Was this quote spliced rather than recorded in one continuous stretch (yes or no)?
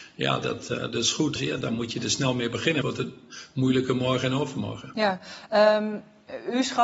yes